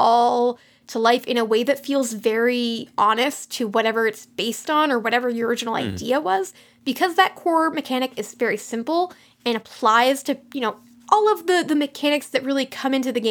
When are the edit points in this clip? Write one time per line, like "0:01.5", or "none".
none

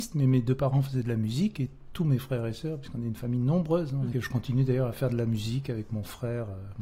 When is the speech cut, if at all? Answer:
0:04.1

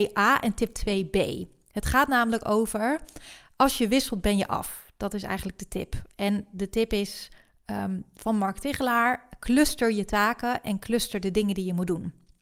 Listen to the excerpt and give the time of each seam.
none

